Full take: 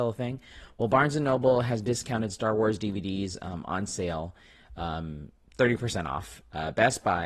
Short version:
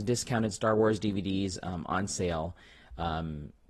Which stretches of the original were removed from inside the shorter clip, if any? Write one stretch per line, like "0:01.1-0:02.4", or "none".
none